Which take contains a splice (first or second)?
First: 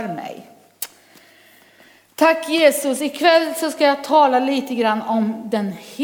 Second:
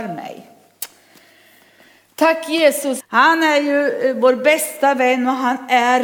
second